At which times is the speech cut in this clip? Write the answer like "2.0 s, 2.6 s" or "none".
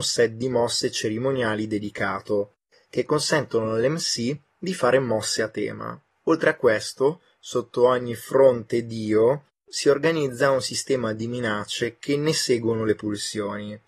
6.2 s